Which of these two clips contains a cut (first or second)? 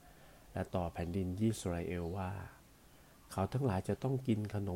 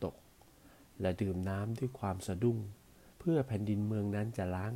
second